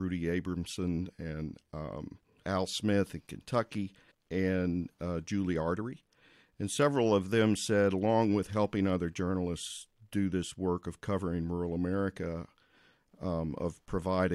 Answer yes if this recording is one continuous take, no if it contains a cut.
no